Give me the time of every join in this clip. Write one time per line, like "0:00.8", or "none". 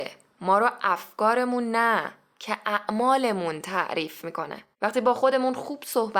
0:04.7